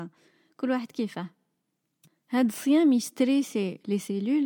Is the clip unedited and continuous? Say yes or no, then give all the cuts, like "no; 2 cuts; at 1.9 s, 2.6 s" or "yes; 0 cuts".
yes; 0 cuts